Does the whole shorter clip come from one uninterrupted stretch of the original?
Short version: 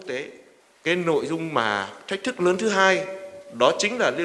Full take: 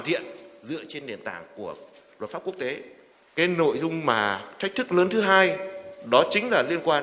yes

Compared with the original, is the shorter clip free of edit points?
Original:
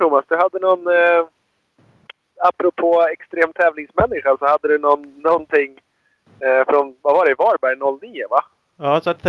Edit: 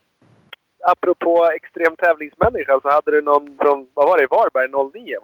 no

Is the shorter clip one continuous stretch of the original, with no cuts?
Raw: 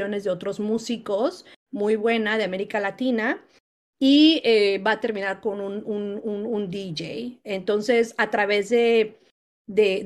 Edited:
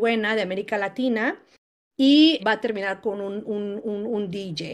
no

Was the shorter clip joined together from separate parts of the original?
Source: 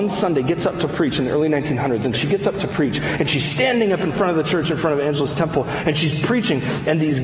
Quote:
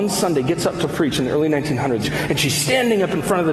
yes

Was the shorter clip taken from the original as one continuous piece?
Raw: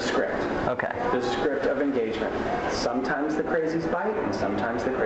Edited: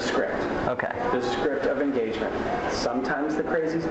yes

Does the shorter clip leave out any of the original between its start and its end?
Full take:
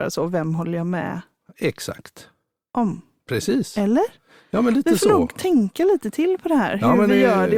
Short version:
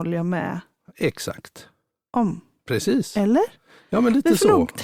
no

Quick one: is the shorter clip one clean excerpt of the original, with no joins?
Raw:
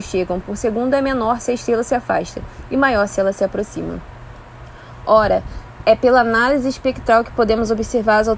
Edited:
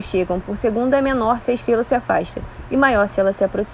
yes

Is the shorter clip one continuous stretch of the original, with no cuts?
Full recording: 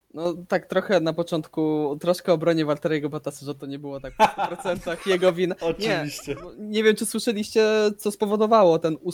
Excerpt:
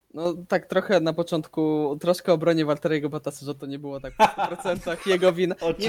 yes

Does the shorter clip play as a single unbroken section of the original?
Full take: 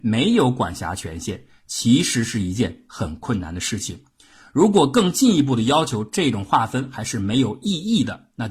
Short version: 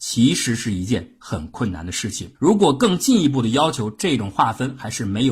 no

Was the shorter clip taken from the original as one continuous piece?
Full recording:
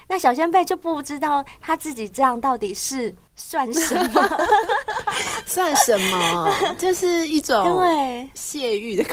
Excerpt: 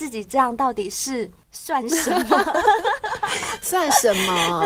yes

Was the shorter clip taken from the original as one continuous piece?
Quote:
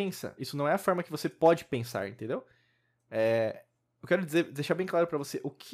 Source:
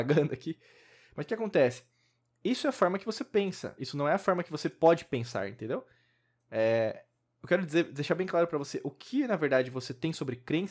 yes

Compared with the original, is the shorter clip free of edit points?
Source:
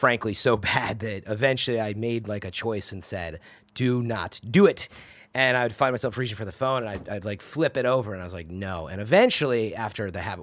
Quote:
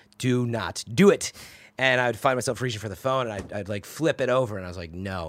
yes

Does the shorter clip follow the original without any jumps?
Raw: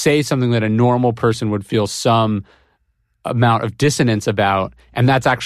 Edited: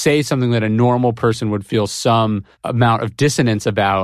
no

